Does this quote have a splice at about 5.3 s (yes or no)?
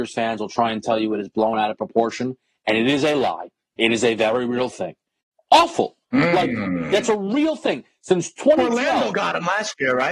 yes